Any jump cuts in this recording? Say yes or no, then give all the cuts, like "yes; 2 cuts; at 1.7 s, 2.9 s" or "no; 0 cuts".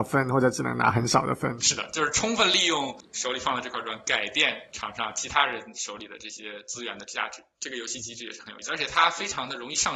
yes; 1 cut; at 1.6 s